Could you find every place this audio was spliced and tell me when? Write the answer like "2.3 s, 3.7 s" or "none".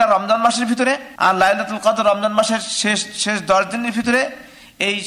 1.2 s